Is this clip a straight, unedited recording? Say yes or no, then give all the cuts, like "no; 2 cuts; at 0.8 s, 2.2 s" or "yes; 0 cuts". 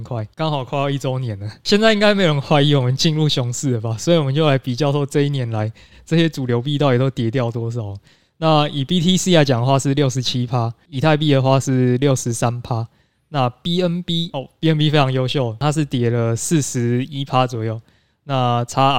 yes; 0 cuts